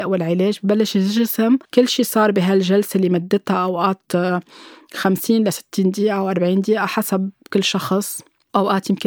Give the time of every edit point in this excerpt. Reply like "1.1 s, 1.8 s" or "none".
1.6 s